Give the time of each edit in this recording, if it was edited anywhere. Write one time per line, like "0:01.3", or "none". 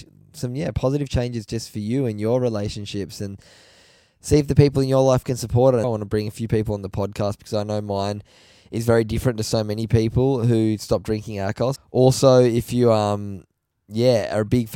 0:05.8
0:11.8